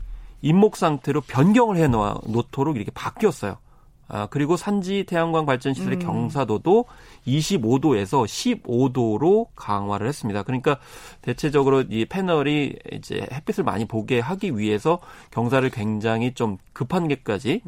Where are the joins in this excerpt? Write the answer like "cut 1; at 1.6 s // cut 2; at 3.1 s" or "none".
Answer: none